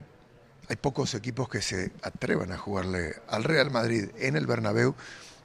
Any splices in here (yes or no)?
no